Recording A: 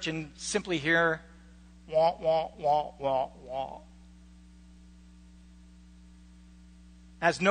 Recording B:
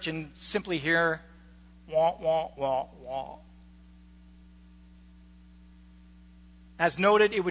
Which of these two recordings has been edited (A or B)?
B